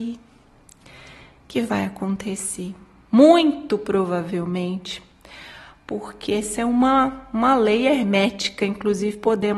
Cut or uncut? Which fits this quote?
uncut